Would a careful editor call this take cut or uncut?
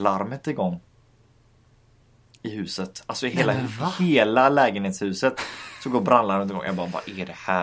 uncut